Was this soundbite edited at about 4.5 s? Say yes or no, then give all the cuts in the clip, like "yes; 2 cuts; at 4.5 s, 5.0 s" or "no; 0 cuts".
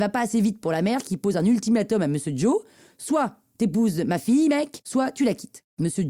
no; 0 cuts